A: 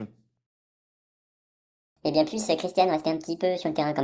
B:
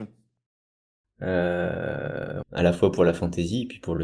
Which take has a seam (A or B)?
B